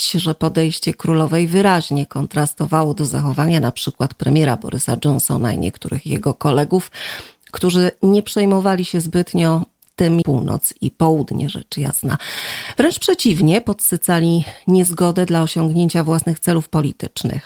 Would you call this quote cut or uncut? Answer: cut